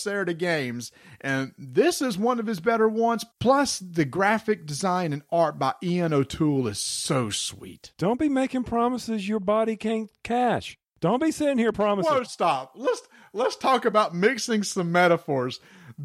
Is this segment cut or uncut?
cut